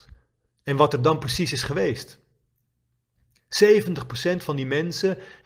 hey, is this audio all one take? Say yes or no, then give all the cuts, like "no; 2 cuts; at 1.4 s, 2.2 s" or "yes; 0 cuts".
yes; 0 cuts